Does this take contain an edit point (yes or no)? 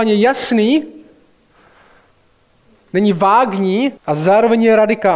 yes